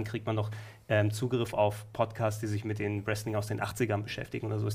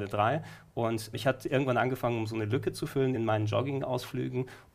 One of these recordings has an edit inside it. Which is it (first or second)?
second